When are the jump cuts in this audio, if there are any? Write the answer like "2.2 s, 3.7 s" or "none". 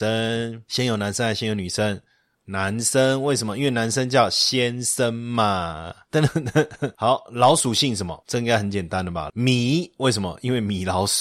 9.3 s